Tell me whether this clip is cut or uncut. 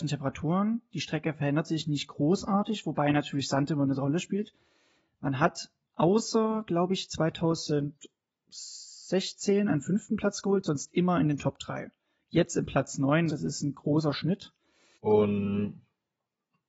cut